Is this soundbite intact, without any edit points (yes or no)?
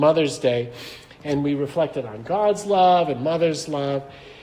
yes